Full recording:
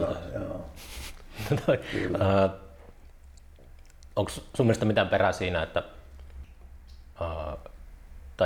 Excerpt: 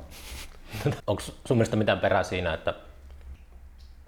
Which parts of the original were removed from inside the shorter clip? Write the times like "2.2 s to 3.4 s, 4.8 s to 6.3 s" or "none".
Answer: 1.7 s to 4.1 s